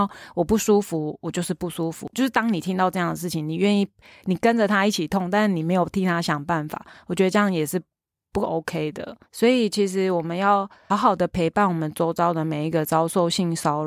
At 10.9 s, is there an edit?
yes; 3 cuts; at 2.1 s, 9.3 s, 10.9 s

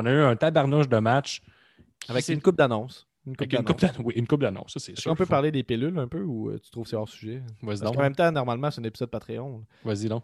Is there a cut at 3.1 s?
no; 0 cuts

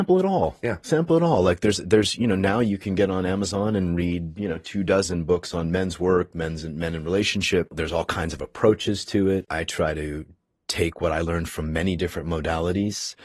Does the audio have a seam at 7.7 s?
no; 0 cuts

